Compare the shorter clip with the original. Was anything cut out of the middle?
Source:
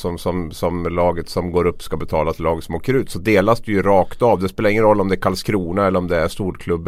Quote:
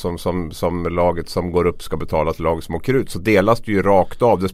no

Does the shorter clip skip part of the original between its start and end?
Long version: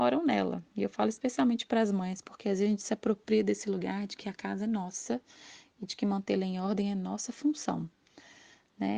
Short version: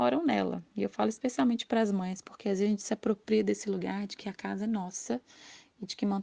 no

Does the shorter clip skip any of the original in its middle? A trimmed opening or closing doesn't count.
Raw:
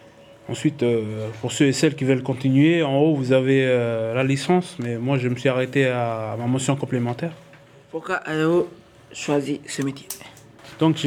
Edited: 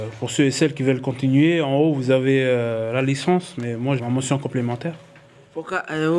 yes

